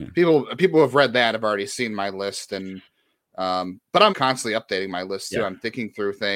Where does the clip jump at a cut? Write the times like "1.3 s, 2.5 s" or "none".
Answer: 4.1 s